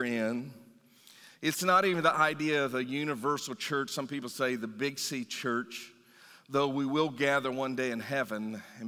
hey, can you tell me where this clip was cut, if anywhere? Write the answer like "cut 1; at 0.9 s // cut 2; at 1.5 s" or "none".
none